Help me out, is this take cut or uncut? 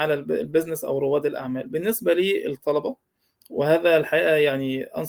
uncut